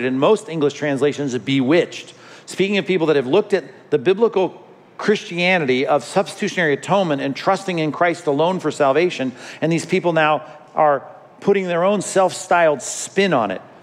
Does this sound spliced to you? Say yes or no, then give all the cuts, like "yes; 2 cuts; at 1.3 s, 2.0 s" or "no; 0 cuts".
no; 0 cuts